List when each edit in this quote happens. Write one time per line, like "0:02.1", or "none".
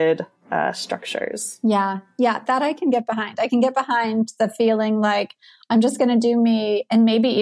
none